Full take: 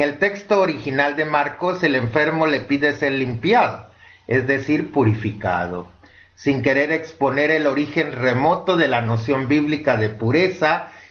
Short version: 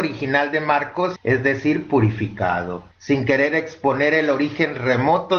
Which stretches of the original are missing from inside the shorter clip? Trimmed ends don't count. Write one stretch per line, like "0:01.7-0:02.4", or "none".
0:01.8-0:04.2
0:05.9-0:06.3